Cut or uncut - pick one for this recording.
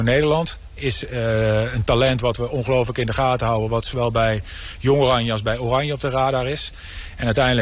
uncut